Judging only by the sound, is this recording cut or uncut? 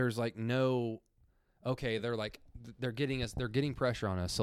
uncut